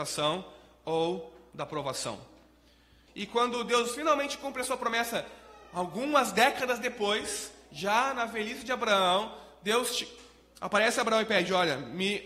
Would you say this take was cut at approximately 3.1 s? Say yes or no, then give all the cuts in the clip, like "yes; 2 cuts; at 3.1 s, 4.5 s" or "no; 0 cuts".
yes; 1 cut; at 3.1 s